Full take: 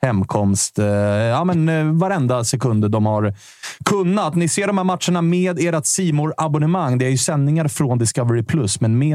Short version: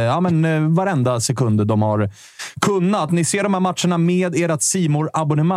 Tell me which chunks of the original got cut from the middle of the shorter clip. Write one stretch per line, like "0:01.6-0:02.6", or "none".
none